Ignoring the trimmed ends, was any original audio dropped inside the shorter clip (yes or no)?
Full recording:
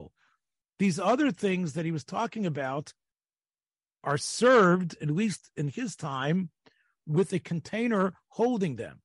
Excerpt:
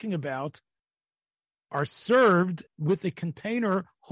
yes